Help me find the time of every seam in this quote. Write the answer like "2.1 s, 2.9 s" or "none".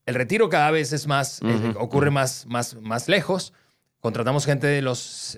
none